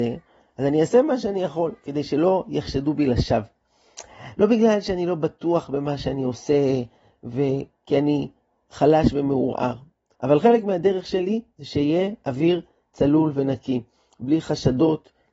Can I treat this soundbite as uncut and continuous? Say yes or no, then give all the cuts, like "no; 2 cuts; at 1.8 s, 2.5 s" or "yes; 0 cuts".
no; 1 cut; at 10.1 s